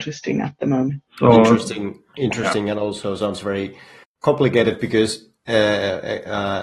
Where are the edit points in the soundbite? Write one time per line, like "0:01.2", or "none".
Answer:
0:01.1